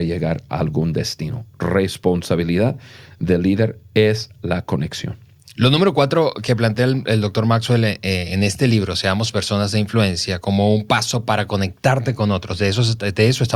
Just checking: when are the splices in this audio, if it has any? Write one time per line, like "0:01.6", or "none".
none